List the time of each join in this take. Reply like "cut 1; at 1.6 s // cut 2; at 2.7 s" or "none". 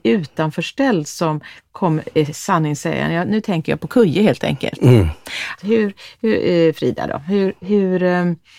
cut 1; at 5.6 s